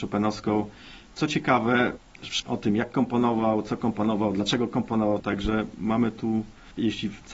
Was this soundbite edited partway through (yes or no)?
yes